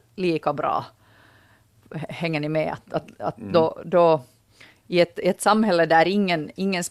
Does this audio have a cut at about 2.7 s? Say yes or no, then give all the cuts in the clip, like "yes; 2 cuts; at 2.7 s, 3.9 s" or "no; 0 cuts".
no; 0 cuts